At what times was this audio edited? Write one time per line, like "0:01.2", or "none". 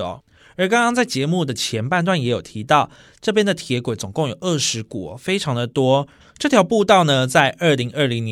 0:06.2